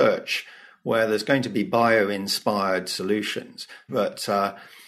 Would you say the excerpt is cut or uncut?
cut